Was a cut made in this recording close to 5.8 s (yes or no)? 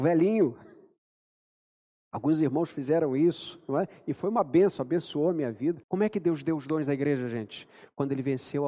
yes